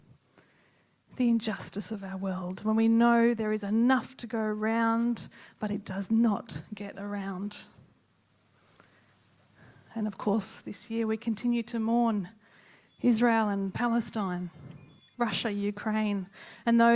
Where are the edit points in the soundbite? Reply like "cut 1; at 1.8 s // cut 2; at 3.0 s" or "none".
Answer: cut 1; at 15.1 s